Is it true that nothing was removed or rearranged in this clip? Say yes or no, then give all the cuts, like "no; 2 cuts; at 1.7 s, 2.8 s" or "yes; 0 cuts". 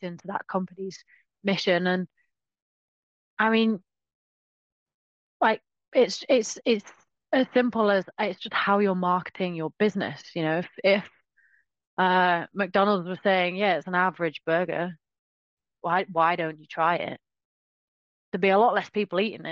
yes; 0 cuts